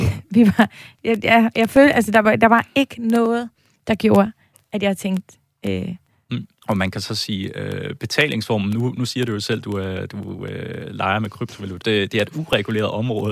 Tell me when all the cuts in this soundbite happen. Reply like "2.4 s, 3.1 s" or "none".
6.6 s, 11.8 s